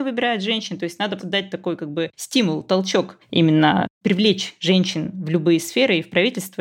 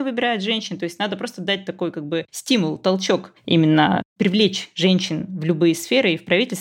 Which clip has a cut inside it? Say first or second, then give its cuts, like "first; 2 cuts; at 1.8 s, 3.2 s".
first; 1 cut; at 1.2 s